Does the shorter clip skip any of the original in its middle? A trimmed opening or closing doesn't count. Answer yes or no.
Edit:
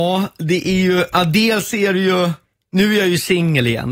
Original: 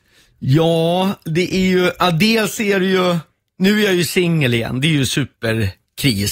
no